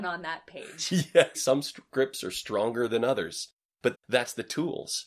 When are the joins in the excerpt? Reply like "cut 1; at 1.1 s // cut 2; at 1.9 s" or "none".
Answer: cut 1; at 1.3 s // cut 2; at 3.9 s